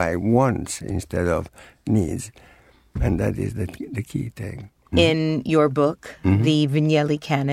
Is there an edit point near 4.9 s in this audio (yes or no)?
yes